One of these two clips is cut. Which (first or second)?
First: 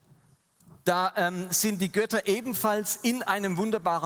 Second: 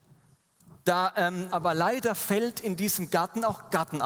second